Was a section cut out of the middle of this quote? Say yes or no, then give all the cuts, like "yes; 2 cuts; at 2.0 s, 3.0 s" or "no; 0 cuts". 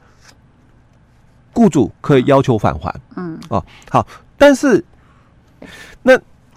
yes; 1 cut; at 5.6 s